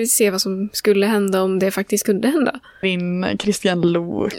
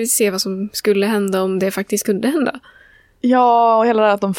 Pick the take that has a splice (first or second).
first